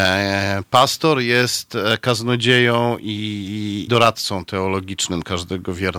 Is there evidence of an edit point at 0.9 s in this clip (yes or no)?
no